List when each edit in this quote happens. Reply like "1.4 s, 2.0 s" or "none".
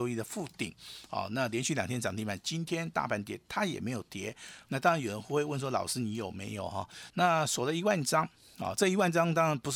4.7 s, 7.1 s